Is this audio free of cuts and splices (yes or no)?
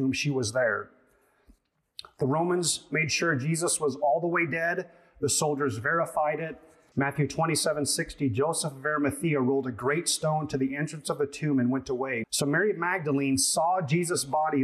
no